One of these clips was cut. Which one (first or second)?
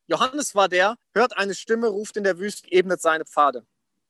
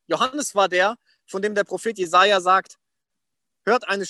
first